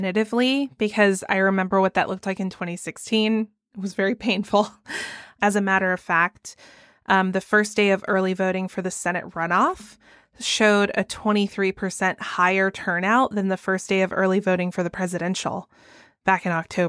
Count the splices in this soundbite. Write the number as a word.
one